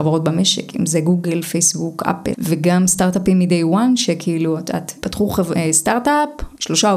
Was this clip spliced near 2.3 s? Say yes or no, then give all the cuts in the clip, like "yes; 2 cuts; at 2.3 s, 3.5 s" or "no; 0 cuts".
yes; 1 cut; at 2.3 s